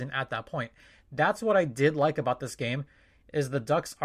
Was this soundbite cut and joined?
no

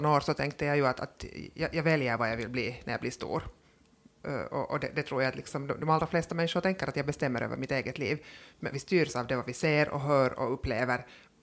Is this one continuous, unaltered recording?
no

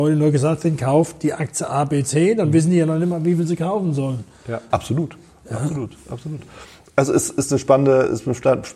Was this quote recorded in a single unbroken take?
no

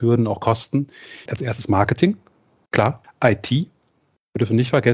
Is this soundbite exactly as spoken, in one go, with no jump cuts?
no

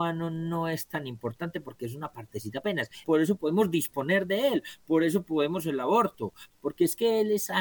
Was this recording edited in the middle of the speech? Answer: yes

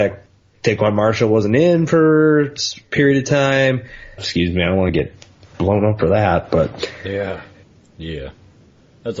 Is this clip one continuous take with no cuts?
no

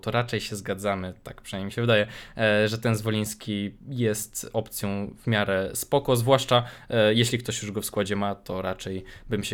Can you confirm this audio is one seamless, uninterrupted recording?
no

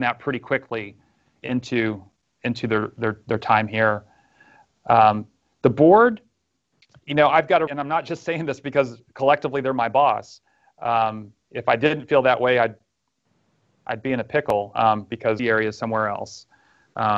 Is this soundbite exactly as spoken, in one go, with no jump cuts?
no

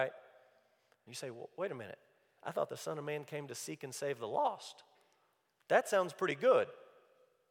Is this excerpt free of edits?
no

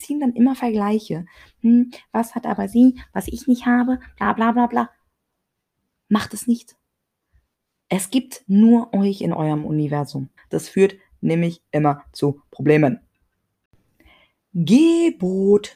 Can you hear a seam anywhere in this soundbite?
yes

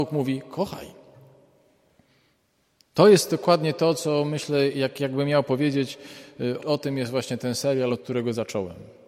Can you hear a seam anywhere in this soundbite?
yes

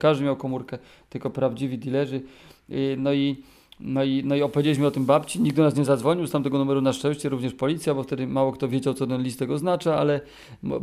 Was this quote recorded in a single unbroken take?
yes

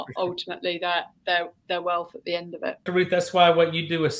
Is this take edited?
yes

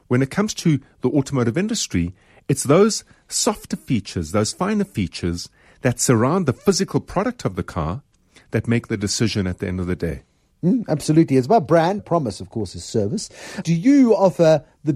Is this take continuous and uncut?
no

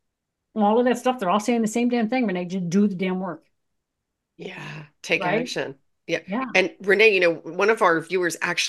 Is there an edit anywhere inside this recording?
no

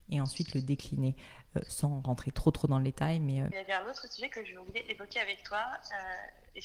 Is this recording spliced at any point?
yes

